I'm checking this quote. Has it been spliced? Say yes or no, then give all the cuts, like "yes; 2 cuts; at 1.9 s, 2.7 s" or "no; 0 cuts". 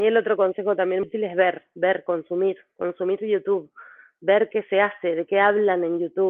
yes; 1 cut; at 1.0 s